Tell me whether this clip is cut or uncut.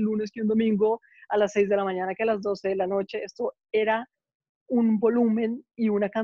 uncut